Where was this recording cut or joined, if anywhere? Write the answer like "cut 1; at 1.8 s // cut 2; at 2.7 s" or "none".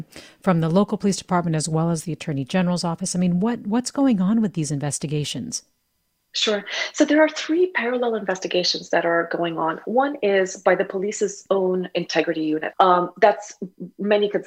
cut 1; at 12.7 s